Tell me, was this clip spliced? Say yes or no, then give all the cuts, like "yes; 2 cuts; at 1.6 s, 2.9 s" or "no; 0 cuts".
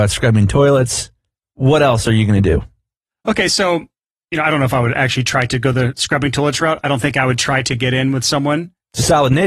no; 0 cuts